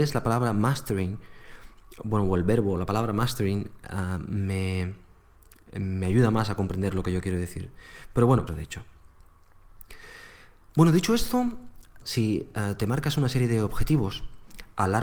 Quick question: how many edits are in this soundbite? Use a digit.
3